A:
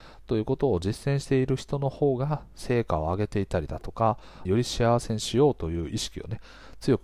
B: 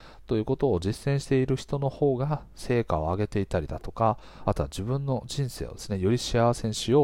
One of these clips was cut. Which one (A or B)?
A